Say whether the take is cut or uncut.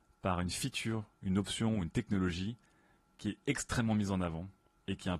uncut